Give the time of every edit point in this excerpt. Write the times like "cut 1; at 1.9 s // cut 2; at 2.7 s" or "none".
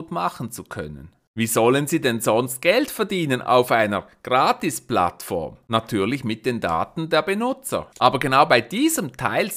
cut 1; at 7.9 s

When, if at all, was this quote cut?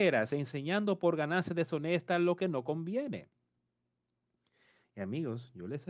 none

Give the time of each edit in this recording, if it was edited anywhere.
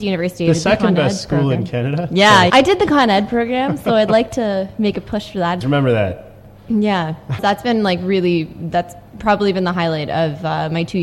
cut 1; at 2.5 s // cut 2; at 5.6 s // cut 3; at 7.4 s

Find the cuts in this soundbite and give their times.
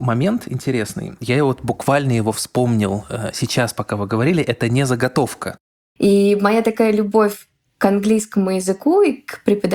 cut 1; at 6.0 s

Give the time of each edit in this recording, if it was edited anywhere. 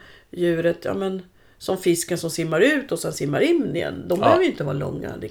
none

